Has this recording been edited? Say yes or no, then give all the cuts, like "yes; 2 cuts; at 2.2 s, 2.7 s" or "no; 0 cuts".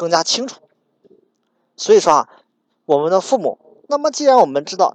yes; 1 cut; at 3.9 s